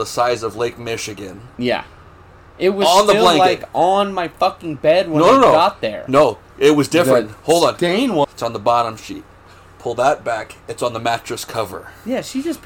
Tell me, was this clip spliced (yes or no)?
yes